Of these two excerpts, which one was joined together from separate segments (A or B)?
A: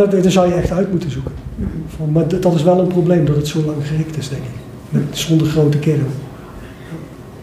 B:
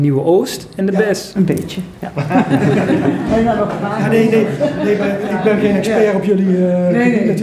B